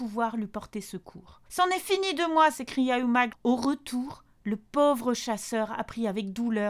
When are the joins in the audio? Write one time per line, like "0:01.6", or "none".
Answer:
0:01.5
0:03.3